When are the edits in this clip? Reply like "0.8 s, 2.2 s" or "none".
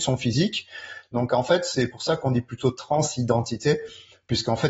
none